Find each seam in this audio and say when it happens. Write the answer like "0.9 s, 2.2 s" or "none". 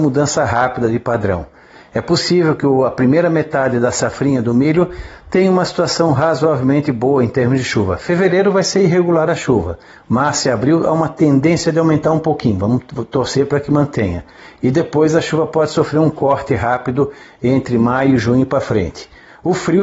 none

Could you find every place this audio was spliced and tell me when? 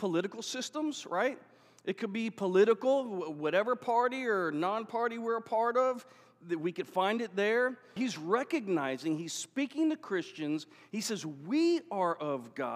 8.0 s

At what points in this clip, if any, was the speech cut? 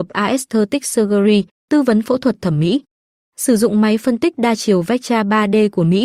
3.2 s

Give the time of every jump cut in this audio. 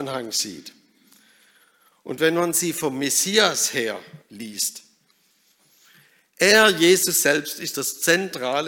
4.2 s

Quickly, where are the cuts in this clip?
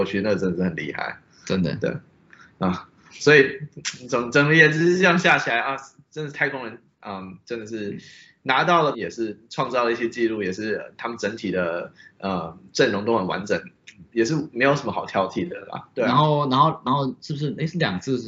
8.9 s, 15.9 s

